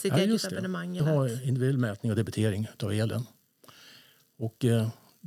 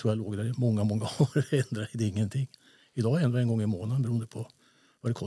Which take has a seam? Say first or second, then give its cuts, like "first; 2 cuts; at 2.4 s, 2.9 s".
first; 1 cut; at 1.0 s